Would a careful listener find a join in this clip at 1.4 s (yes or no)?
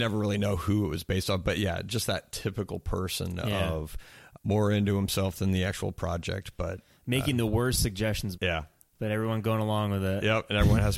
no